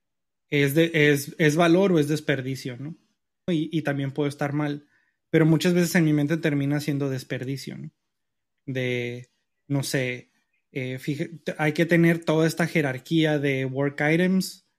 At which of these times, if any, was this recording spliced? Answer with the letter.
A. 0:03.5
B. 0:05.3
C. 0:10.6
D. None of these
A